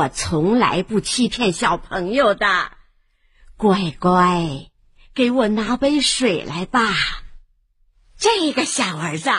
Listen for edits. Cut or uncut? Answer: uncut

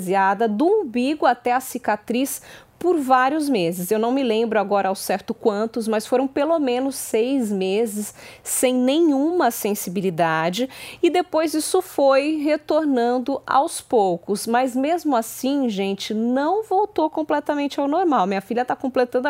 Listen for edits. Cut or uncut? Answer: uncut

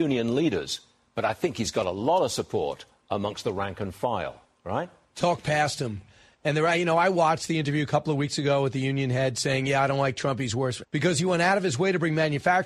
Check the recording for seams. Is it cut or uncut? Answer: cut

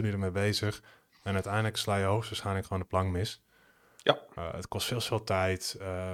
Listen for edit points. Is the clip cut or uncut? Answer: uncut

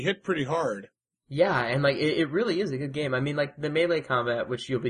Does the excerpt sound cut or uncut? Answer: uncut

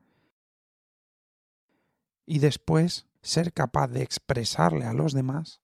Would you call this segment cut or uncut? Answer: cut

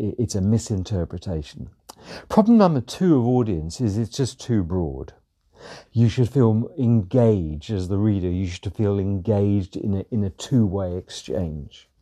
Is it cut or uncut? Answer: cut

